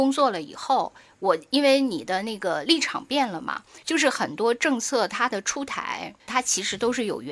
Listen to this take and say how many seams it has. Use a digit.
2